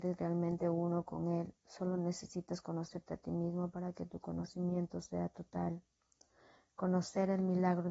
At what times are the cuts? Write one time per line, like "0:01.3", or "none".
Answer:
none